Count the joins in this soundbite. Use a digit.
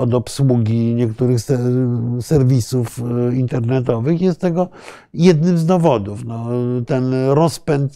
0